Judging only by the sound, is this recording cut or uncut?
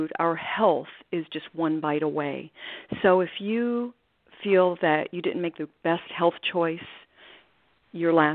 uncut